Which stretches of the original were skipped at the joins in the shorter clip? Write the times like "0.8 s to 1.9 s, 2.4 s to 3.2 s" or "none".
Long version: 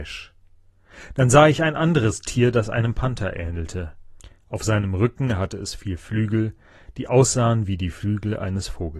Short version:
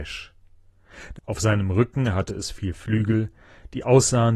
1.2 s to 4.4 s